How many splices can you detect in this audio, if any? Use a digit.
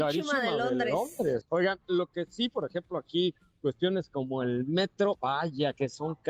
1